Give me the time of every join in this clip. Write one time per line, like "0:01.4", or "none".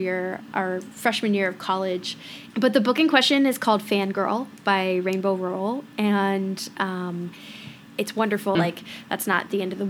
0:02.5
0:08.5